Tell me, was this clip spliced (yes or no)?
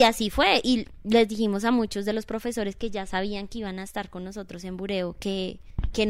no